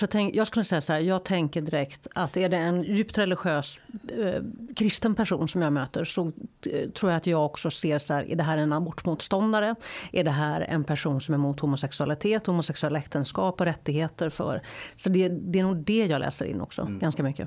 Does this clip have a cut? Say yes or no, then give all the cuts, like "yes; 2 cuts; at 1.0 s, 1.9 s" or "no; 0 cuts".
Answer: no; 0 cuts